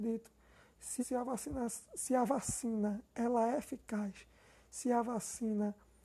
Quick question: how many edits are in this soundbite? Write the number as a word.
one